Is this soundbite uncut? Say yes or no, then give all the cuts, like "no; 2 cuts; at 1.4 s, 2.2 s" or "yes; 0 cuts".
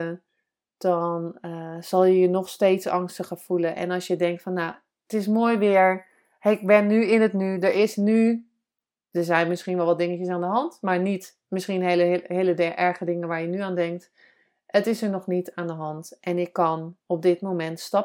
yes; 0 cuts